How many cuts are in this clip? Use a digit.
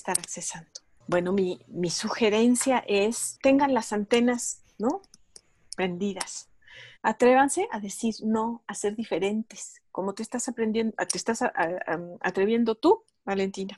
1